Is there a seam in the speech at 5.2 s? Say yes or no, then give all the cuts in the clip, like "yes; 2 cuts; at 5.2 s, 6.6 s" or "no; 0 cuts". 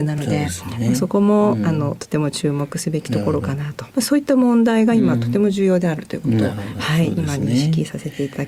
no; 1 cut; at 3.9 s